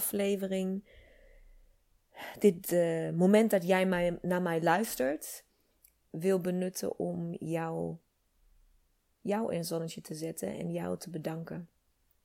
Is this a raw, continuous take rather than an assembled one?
yes; 0 cuts

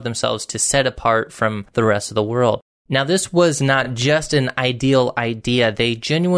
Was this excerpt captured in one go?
yes; 0 cuts

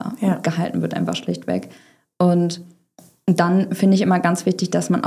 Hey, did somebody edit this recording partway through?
no; 0 cuts

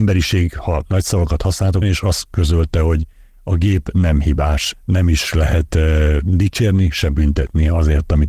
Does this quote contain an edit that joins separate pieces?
yes; 2 cuts; at 1.8 s, 4.7 s

